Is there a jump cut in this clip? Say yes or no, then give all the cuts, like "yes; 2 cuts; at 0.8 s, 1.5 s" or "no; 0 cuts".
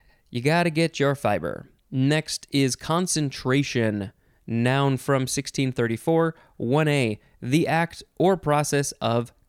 no; 0 cuts